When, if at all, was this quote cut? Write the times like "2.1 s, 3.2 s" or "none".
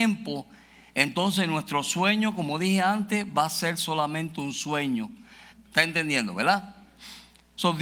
5.5 s